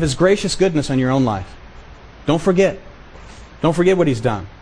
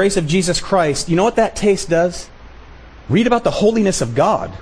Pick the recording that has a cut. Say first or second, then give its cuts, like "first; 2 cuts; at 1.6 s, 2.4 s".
second; 1 cut; at 3.0 s